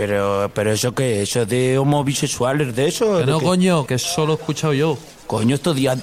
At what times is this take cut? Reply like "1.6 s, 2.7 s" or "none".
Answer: 3.9 s